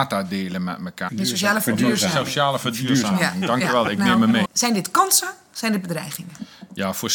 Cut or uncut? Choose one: cut